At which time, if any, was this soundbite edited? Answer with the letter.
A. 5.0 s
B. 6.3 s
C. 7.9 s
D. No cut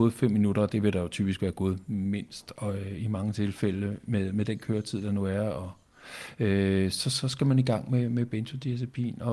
D